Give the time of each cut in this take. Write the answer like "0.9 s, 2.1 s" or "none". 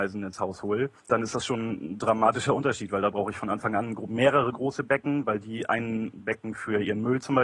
1.0 s